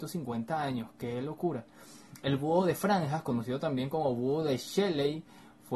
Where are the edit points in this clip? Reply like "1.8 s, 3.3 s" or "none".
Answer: none